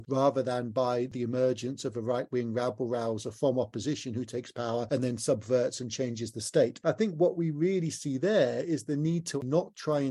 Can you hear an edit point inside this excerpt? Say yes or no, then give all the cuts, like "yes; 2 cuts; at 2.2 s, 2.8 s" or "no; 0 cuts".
no; 0 cuts